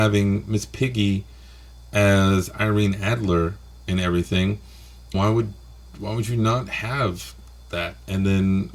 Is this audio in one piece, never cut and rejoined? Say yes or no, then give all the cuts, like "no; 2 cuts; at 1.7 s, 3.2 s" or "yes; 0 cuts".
no; 1 cut; at 5.1 s